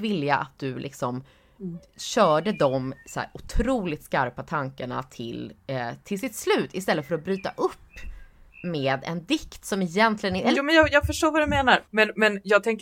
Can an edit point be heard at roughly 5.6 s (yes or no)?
no